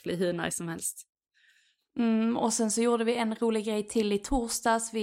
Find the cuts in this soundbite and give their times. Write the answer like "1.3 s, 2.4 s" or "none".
none